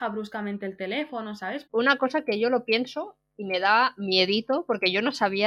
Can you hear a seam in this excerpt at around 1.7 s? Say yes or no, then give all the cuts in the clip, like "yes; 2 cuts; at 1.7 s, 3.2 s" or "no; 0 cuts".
yes; 1 cut; at 1.7 s